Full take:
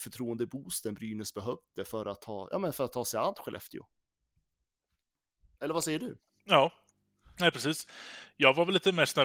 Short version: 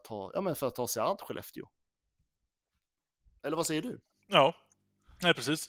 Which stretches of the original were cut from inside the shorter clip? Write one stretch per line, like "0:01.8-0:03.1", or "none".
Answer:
none